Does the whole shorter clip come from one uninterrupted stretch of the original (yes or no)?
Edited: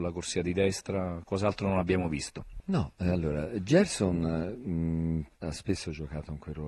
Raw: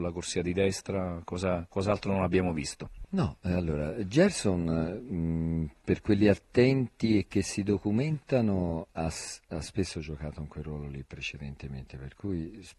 no